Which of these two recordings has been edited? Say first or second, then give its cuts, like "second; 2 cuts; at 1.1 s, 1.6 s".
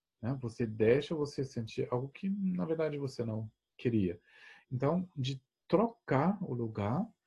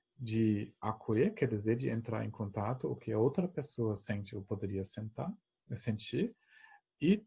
first; 1 cut; at 4.6 s